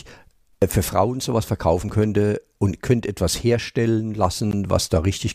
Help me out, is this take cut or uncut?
uncut